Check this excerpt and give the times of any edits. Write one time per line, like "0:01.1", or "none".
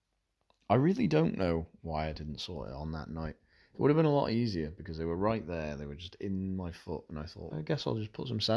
0:07.5

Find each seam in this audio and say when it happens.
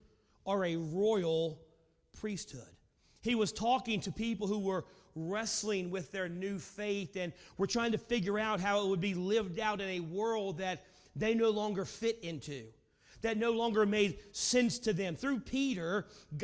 none

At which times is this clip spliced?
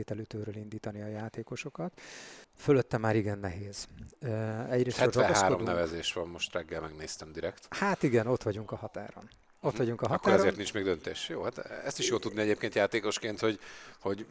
0:02.4

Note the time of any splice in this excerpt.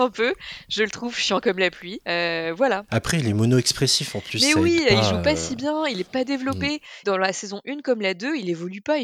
0:07.0

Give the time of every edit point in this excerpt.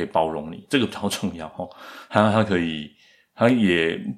none

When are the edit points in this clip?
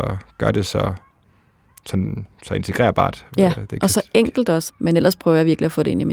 0:04.7

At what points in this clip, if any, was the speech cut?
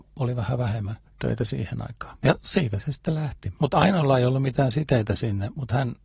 0:03.6

